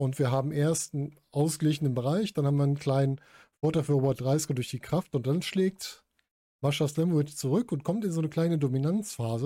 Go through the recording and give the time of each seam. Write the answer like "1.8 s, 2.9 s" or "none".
none